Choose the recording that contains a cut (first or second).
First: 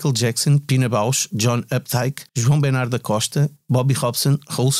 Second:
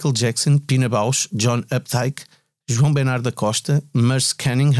first